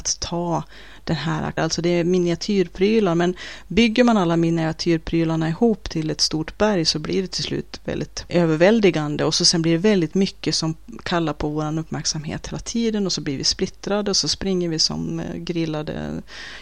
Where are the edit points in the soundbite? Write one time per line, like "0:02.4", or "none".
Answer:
0:01.6